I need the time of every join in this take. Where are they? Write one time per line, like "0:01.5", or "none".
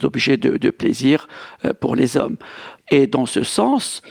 0:02.8